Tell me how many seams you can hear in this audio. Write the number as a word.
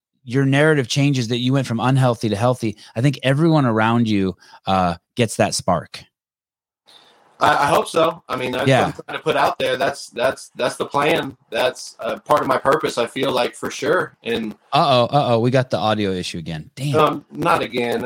zero